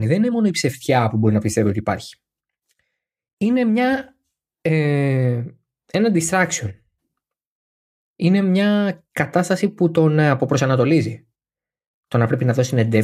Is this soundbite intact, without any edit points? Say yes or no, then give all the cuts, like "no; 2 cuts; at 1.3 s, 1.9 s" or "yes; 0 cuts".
yes; 0 cuts